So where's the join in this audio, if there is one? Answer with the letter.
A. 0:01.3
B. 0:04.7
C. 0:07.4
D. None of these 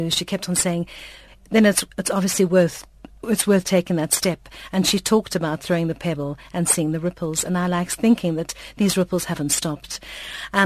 A